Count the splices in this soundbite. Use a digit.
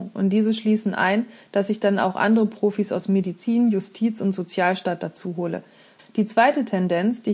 1